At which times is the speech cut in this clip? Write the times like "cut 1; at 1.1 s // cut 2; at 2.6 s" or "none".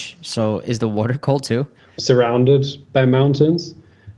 cut 1; at 2.0 s